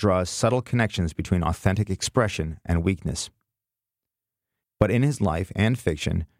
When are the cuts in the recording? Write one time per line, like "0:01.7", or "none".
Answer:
0:04.6